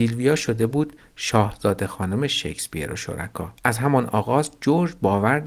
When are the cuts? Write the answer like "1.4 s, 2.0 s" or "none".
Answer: 3.6 s